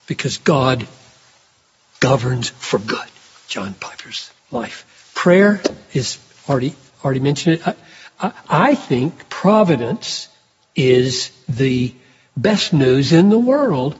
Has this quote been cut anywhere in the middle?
yes; 1 cut; at 4.4 s

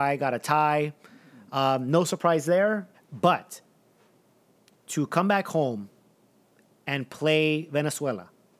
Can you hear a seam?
yes; 1 cut; at 2.9 s

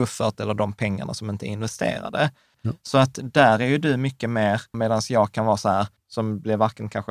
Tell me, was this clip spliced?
yes; 3 cuts; at 2.5 s, 4.7 s, 6.0 s

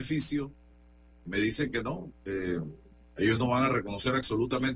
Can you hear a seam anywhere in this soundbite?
yes; 1 cut; at 1.3 s

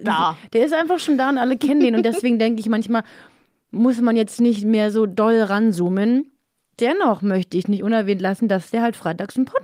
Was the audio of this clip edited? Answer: no; 0 cuts

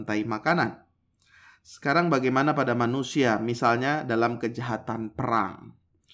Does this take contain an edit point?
no; 0 cuts

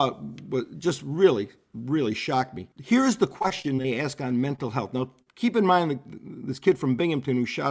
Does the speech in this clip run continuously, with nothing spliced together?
no; 1 cut; at 2.7 s

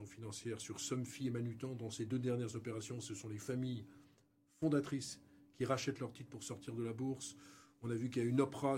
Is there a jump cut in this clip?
no; 0 cuts

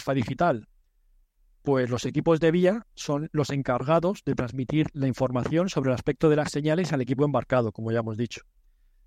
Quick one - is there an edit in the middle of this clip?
no; 0 cuts

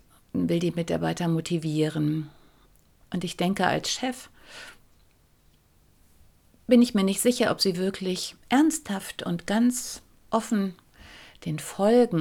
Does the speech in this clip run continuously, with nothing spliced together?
no; 2 cuts; at 3.0 s, 8.4 s

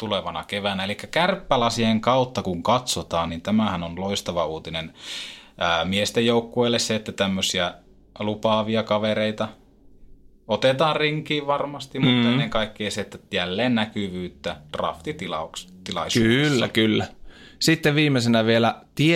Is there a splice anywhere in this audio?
no; 0 cuts

